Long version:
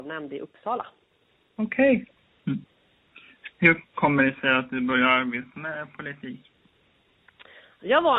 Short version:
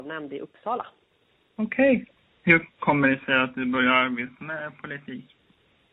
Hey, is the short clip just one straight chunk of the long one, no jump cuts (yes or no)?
no